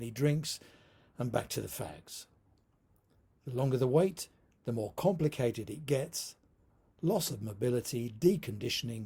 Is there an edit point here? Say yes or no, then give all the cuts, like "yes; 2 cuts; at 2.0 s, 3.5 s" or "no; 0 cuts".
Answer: no; 0 cuts